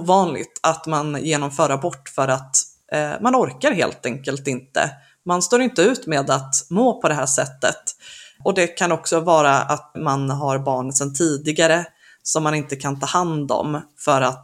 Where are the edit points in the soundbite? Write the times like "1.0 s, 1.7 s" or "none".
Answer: 9.9 s